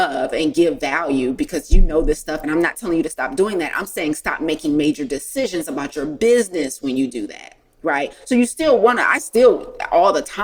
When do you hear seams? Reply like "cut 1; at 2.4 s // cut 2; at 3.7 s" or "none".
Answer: cut 1; at 2.4 s

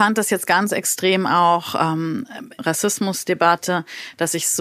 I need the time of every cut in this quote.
cut 1; at 2.6 s

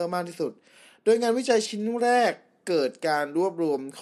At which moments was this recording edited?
none

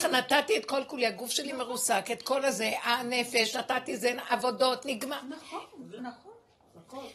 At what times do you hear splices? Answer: cut 1; at 6.0 s

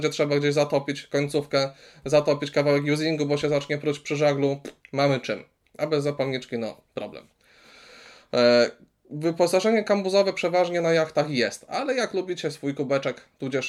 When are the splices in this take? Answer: none

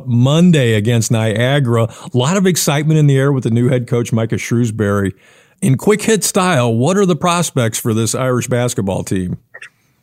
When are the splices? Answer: none

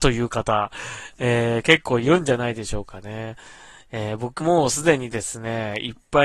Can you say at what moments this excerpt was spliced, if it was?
cut 1; at 4.4 s

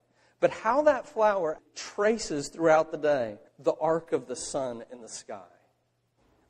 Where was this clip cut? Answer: cut 1; at 1.6 s // cut 2; at 3.5 s

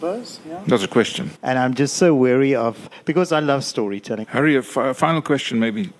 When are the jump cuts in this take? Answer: cut 1; at 1.3 s // cut 2; at 4.2 s

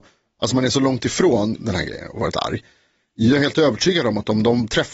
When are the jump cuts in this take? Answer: cut 1; at 1.6 s

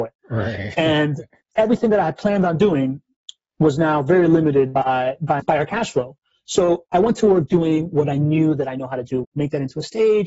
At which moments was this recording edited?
cut 1; at 5.4 s // cut 2; at 9.2 s

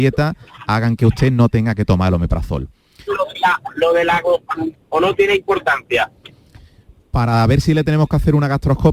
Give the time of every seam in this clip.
cut 1; at 3.1 s // cut 2; at 4.7 s

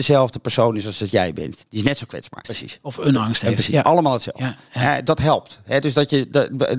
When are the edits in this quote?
cut 1; at 2.4 s

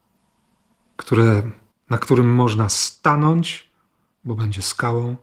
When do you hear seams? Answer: cut 1; at 1.7 s

